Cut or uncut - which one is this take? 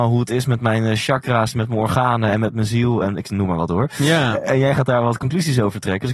uncut